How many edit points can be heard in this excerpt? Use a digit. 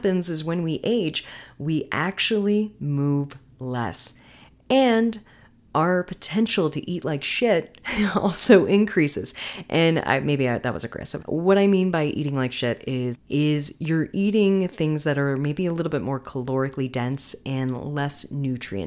2